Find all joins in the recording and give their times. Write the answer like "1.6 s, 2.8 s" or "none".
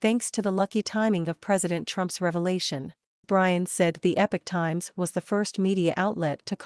3.2 s